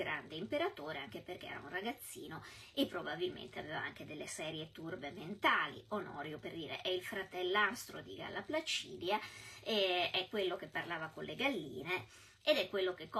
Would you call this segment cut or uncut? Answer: uncut